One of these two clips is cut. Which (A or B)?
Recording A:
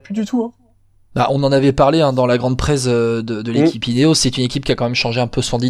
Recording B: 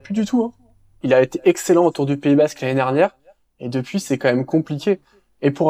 B